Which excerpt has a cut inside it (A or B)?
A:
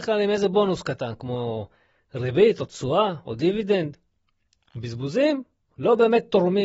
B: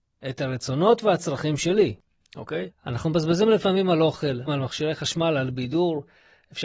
B